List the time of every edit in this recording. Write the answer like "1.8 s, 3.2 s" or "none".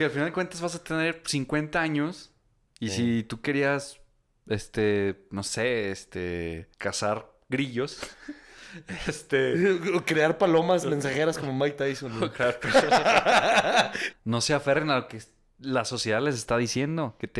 6.7 s, 14.1 s

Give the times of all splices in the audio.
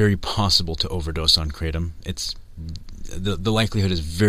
none

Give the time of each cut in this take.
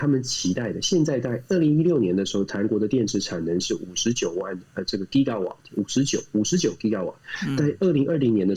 none

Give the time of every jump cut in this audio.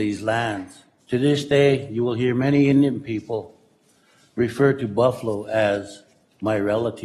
1.0 s

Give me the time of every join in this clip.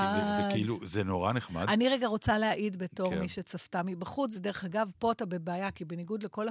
none

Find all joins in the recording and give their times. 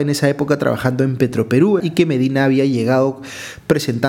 1.8 s

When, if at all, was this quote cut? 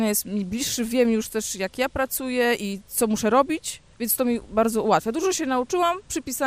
3.9 s

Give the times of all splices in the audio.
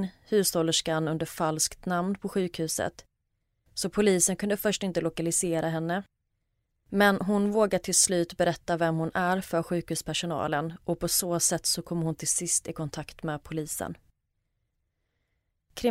none

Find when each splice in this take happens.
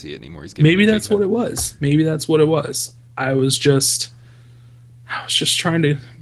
none

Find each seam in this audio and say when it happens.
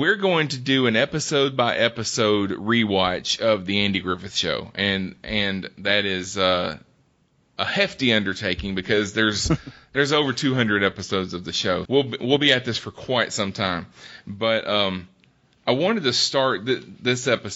11.9 s

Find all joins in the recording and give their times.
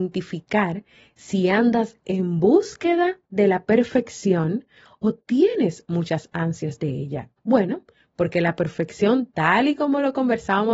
7.4 s

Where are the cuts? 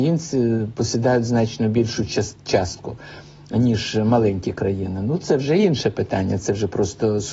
none

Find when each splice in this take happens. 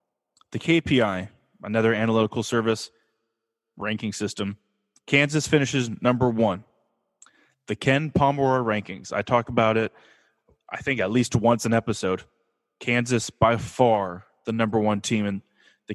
none

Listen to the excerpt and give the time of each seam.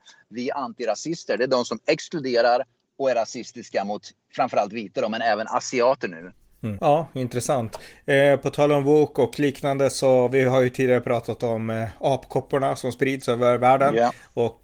6.8 s

